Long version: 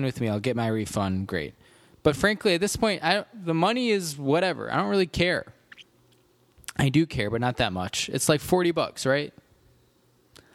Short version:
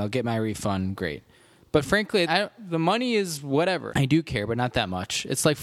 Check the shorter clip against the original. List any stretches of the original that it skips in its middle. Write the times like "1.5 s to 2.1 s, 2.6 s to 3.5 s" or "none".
2.6 s to 3.0 s, 4.6 s to 6.7 s